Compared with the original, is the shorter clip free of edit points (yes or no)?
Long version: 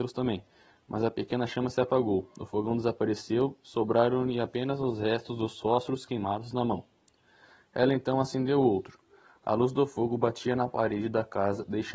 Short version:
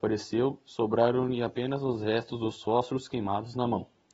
yes